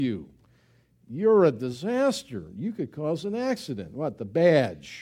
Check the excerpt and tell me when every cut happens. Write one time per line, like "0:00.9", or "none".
none